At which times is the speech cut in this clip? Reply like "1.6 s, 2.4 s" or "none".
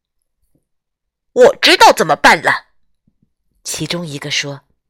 none